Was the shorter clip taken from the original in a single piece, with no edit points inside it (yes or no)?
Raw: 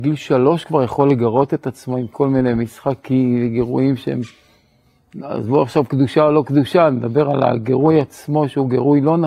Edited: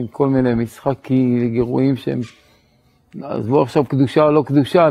yes